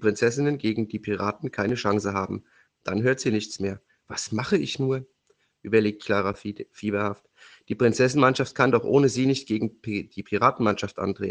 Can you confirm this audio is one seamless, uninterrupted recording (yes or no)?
no